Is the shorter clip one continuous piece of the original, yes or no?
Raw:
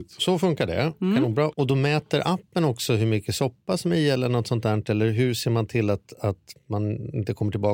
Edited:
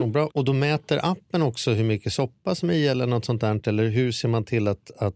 yes